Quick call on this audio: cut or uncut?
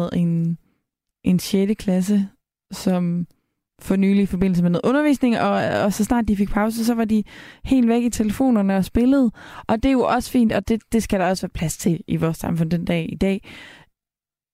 uncut